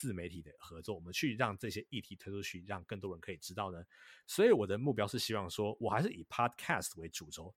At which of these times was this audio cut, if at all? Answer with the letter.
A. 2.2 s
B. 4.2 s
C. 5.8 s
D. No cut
B